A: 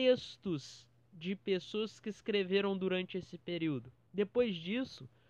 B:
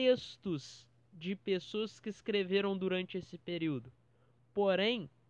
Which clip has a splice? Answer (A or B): A